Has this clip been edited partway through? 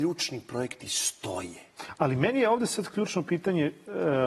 no; 0 cuts

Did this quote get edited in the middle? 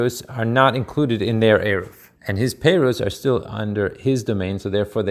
yes; 1 cut; at 2.2 s

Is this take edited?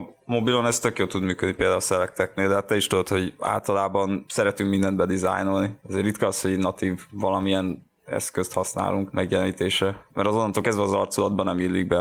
no; 0 cuts

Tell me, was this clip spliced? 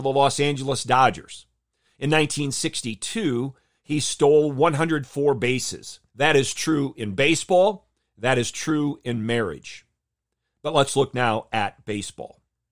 yes; 1 cut; at 6.1 s

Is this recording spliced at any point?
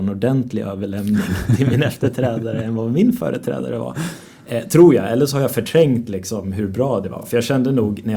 no; 0 cuts

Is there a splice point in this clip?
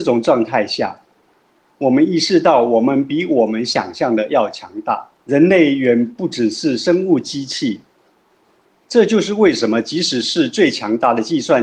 yes; 1 cut; at 5.2 s

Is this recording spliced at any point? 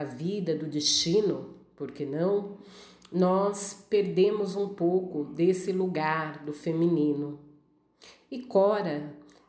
no; 0 cuts

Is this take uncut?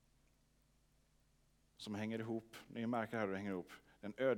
yes; 0 cuts

